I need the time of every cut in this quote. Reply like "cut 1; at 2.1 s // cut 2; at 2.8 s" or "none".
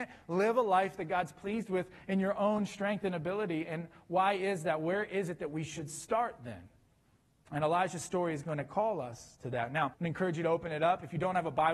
cut 1; at 9.9 s

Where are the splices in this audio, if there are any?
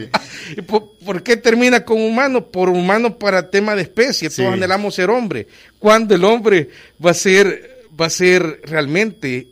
none

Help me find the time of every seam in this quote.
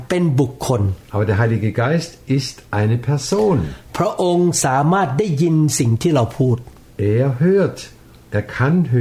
none

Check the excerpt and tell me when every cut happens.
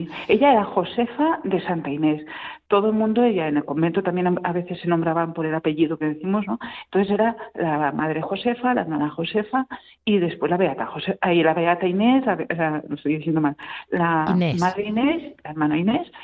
none

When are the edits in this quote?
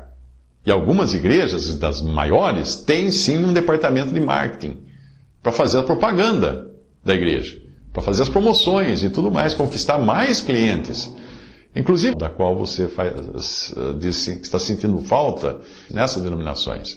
cut 1; at 12.1 s // cut 2; at 15.9 s

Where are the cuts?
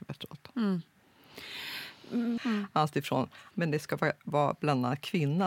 cut 1; at 2.4 s // cut 2; at 3.5 s

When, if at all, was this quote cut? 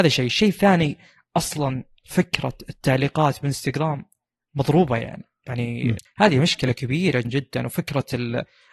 cut 1; at 6.0 s // cut 2; at 7.2 s

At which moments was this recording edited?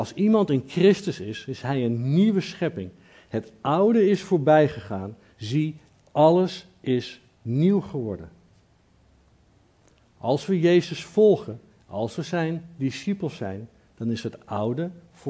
none

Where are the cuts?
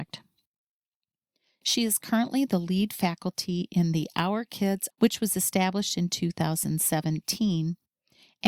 cut 1; at 4.9 s

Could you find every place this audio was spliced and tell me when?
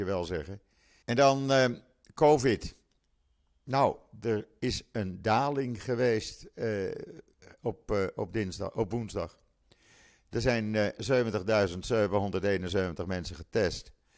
cut 1; at 1.0 s

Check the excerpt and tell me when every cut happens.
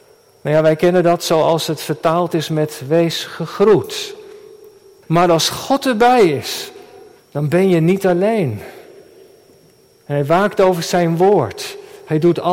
cut 1; at 5.0 s // cut 2; at 7.2 s

